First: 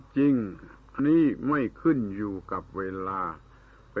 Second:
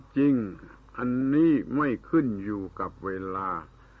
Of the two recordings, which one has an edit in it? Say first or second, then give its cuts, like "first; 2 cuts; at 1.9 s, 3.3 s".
first; 1 cut; at 1.0 s